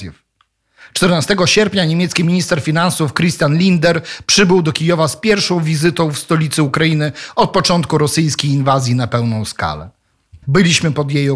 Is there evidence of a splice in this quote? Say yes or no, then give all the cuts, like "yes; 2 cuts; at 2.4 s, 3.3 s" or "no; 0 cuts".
yes; 1 cut; at 10.4 s